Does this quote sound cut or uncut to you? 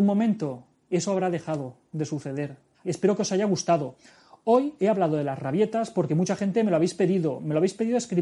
cut